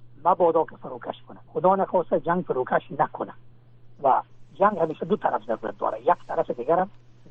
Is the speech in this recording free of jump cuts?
no; 1 cut; at 1.5 s

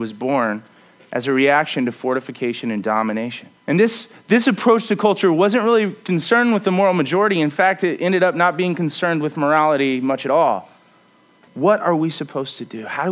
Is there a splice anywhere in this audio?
yes; 2 cuts; at 3.6 s, 11.5 s

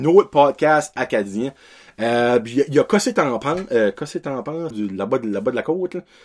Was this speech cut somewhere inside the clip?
yes; 1 cut; at 4.7 s

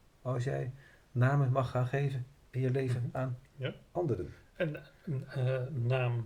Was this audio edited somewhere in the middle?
no; 0 cuts

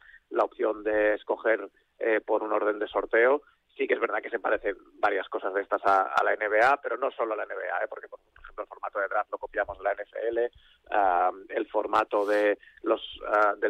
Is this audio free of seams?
yes; 0 cuts

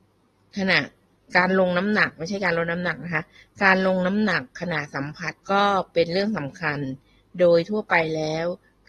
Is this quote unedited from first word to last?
no; 1 cut; at 5.4 s

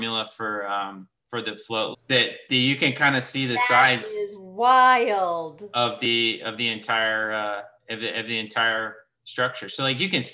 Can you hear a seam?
yes; 1 cut; at 1.9 s

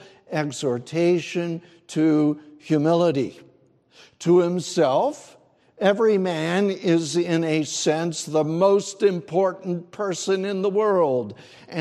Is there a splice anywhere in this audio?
no; 0 cuts

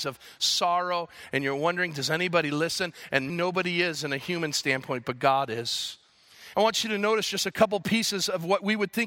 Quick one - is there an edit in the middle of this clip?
yes; 2 cuts; at 3.3 s, 6.5 s

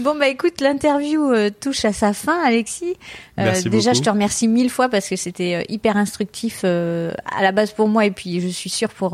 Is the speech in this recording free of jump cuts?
yes; 0 cuts

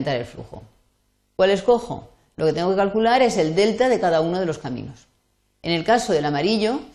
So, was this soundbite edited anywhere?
no; 0 cuts

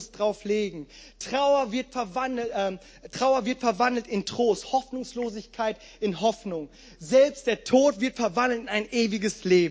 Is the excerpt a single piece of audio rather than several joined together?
yes; 0 cuts

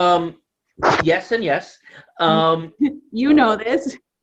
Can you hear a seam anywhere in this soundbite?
yes; 1 cut; at 2.8 s

